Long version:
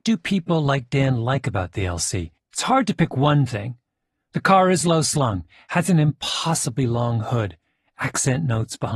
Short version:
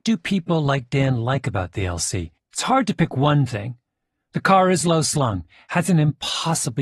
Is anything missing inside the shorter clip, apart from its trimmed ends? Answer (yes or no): no